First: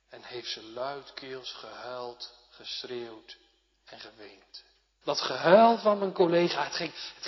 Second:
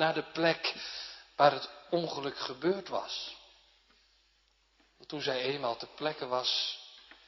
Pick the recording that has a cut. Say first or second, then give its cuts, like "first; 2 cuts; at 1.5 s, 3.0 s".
first; 1 cut; at 5.0 s